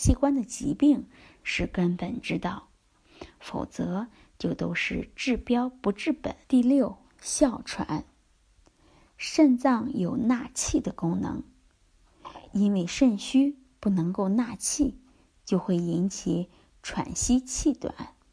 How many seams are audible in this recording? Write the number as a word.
one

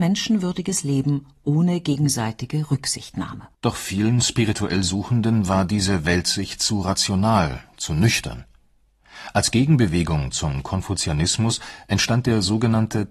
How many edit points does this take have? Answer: one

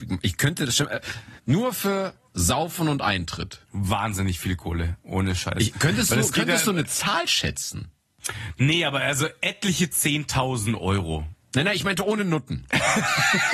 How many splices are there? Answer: two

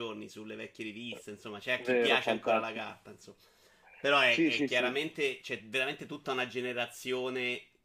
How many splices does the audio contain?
zero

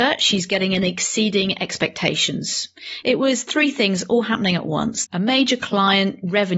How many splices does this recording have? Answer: two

